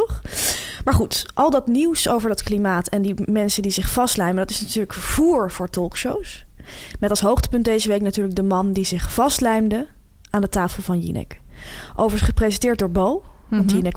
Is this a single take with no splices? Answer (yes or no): yes